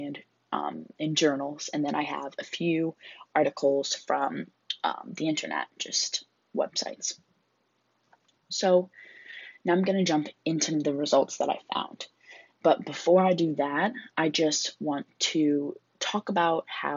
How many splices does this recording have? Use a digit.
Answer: 0